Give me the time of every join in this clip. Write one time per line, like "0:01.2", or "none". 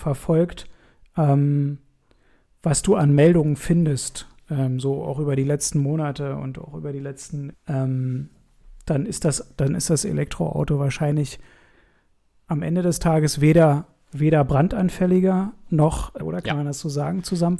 0:07.5
0:16.2